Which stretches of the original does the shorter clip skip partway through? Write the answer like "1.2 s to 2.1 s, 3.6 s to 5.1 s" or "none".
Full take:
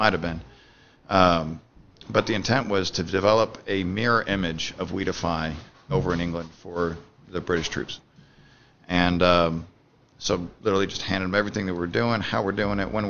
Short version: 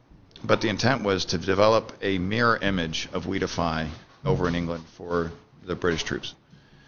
none